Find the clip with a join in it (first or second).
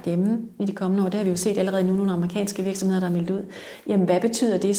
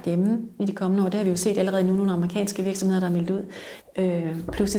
second